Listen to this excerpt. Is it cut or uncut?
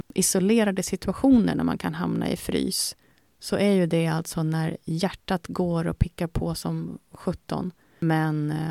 uncut